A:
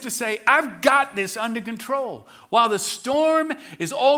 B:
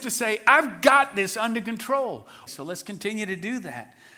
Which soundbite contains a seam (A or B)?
B